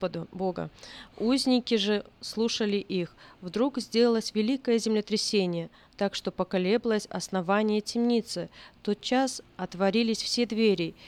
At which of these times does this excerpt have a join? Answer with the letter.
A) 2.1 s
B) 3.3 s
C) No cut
A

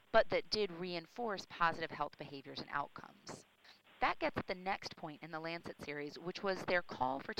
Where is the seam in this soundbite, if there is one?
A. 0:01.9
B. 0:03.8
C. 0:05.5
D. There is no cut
B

